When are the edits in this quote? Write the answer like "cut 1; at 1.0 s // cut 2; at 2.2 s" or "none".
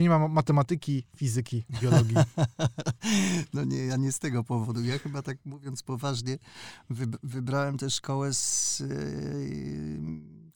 none